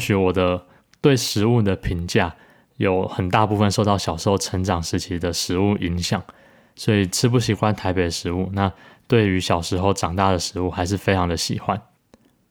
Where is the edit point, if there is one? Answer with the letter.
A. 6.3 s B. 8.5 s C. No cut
C